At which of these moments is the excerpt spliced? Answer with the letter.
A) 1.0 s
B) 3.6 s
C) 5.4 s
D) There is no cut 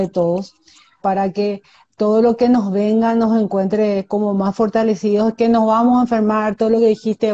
A